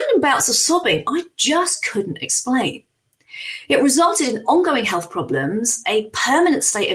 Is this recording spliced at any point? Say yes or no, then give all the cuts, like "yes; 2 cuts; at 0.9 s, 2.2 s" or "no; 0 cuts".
no; 0 cuts